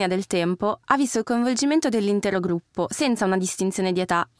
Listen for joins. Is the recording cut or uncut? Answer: uncut